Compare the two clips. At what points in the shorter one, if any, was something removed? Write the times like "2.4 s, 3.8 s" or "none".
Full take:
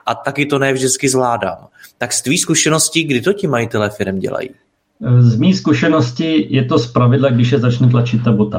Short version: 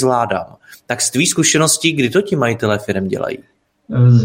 none

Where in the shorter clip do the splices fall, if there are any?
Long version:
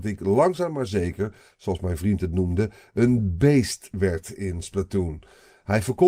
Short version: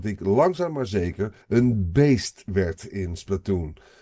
1.4 s

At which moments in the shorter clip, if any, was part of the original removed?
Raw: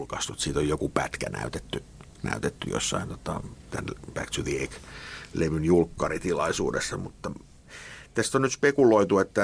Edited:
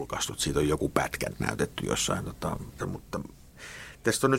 1.3 s, 2.8 s

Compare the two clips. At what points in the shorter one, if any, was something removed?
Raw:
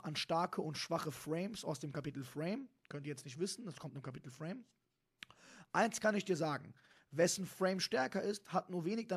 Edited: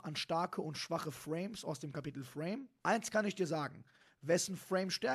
2.8 s

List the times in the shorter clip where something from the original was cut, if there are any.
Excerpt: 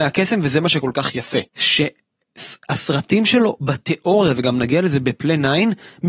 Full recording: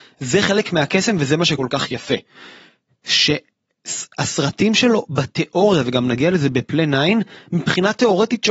1.5 s

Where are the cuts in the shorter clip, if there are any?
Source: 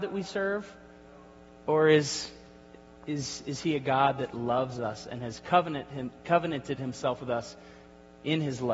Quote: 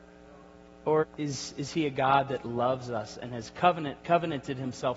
1.0 s, 4.0 s

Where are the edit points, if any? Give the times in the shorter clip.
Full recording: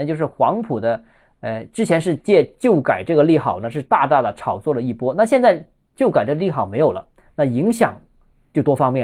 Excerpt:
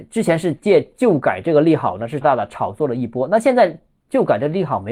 2.2 s

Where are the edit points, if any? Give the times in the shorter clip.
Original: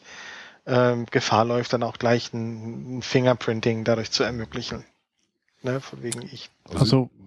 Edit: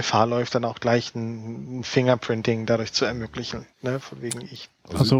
3.7 s

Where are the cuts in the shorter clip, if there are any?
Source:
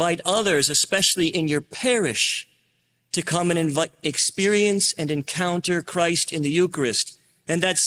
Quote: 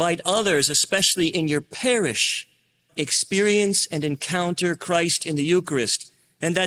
2.9 s

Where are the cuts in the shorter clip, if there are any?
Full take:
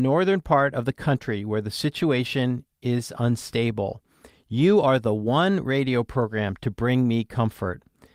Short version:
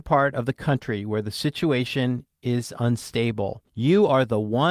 3.7 s

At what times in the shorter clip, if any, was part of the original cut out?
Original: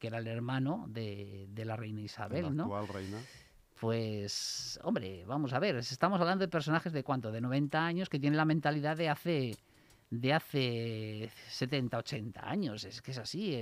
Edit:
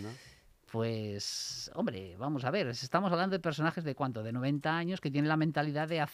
none

